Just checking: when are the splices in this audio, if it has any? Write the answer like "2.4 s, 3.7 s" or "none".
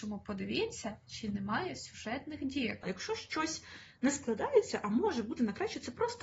2.8 s

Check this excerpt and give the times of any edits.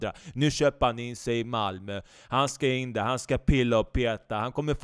none

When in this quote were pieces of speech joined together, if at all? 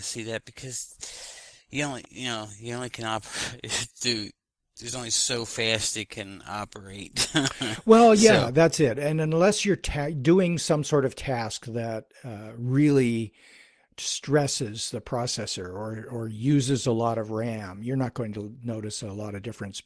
none

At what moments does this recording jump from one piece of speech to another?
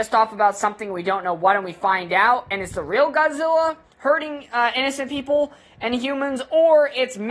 none

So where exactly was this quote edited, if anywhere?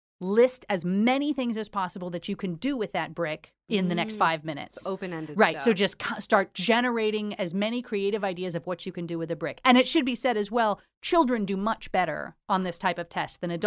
none

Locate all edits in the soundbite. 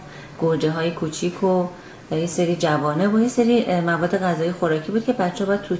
none

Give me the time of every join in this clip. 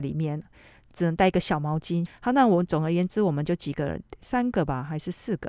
2.1 s

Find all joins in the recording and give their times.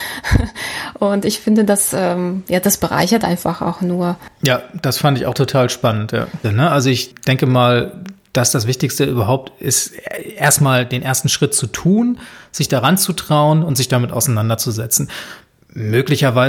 6.4 s

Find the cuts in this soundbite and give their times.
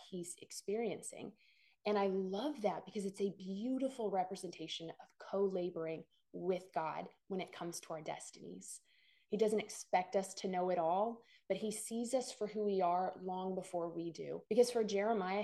14.5 s

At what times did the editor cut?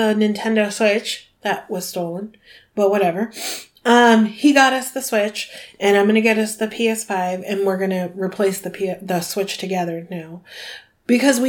none

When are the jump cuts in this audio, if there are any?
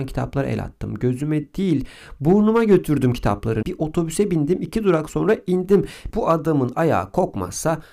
3.6 s, 6.1 s

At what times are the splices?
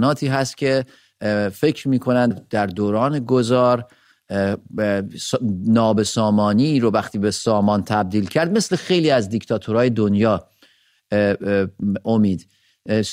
2.3 s

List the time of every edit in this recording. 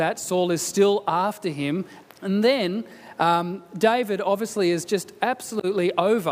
2.0 s

